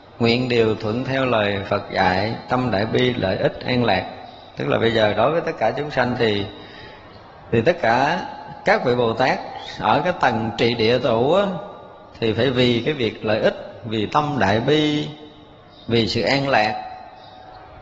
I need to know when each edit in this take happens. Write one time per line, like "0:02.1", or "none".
none